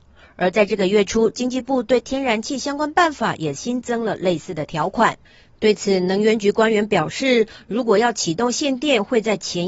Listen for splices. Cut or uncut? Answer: uncut